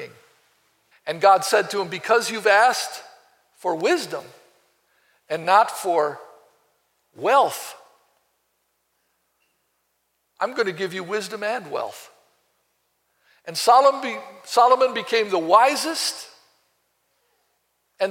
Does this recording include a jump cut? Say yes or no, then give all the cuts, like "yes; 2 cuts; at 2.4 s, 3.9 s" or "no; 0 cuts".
yes; 1 cut; at 0.9 s